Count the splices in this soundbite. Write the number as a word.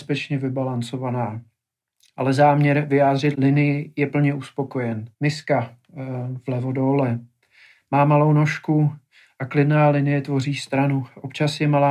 two